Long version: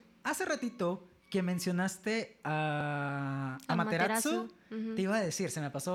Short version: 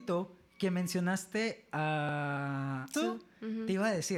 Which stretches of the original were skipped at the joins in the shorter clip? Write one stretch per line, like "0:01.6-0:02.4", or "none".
0:03.7-0:04.2